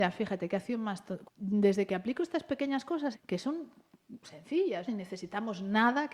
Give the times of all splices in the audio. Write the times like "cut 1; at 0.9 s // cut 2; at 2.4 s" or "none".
cut 1; at 1.2 s // cut 2; at 3.1 s // cut 3; at 4.9 s